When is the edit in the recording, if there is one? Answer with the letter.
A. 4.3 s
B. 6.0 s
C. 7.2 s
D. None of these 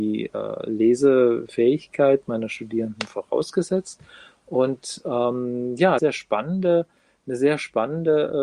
B